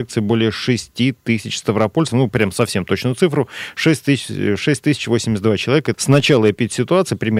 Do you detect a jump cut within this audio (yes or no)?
yes